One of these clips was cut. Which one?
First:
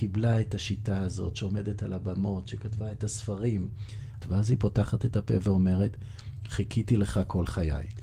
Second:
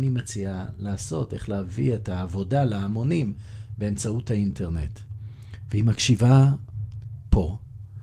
first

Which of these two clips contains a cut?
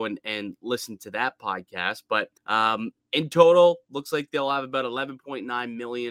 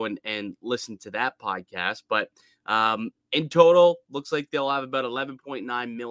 first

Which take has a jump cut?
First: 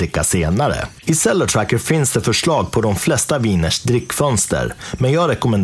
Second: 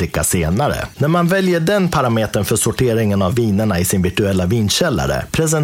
second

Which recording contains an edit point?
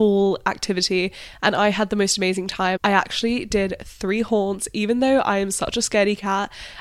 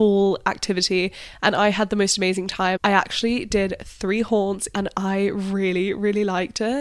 second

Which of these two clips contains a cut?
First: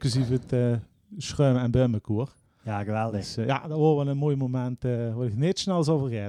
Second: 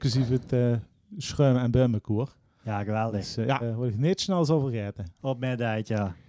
second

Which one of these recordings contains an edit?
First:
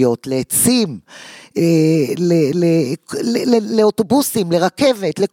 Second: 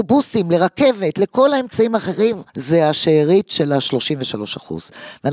second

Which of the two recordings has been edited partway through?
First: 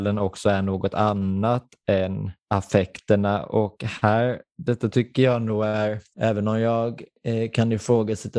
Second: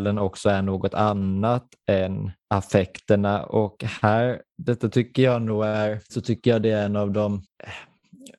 second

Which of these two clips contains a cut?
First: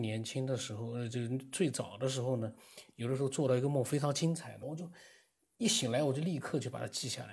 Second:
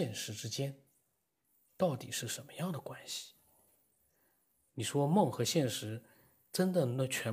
first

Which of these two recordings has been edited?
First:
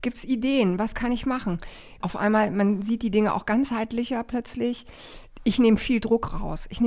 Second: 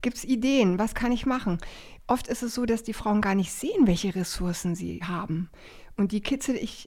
first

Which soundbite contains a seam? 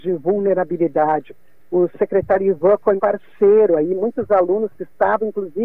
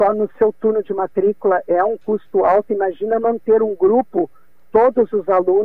first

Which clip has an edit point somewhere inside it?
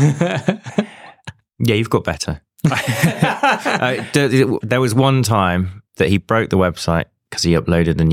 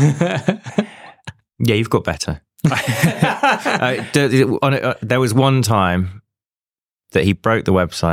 first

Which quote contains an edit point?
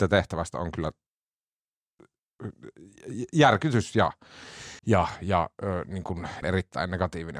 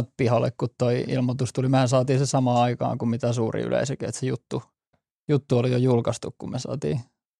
first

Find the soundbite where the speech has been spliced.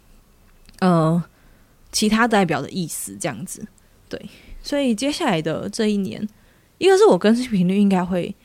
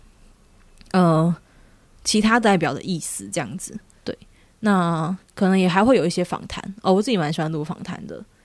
second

